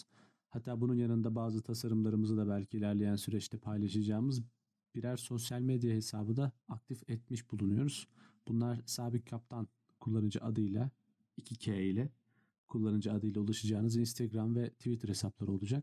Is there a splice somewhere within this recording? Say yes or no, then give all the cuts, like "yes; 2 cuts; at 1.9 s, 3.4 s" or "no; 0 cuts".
yes; 1 cut; at 6.6 s